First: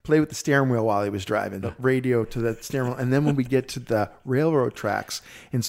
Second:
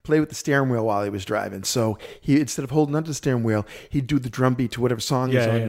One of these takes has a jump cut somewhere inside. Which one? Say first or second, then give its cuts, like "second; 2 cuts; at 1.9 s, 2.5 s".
first; 1 cut; at 1.6 s